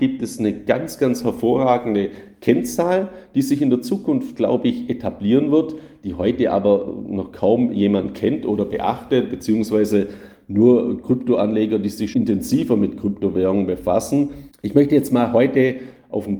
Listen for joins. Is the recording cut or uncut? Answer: cut